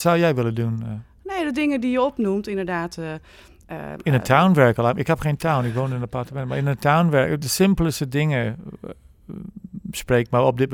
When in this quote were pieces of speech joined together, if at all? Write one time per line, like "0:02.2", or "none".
0:07.4